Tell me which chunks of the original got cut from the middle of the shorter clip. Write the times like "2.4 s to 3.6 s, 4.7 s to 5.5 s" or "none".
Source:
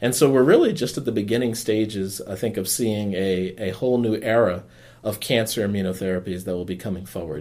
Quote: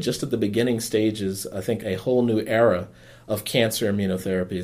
2.5 s to 3.6 s